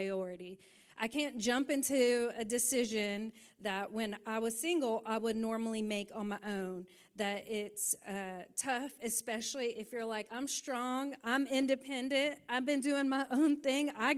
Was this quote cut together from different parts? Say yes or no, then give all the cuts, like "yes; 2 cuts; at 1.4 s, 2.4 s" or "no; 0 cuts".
no; 0 cuts